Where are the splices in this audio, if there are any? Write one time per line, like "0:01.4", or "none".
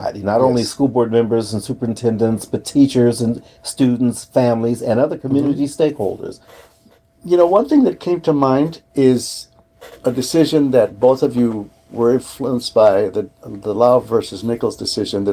0:08.9